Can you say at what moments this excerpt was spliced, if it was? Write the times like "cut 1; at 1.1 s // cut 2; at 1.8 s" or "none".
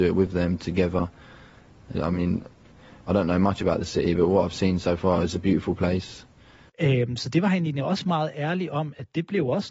cut 1; at 1.9 s // cut 2; at 6.7 s